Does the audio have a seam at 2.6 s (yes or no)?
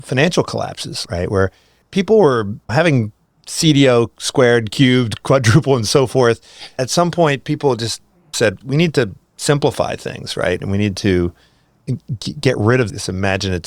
yes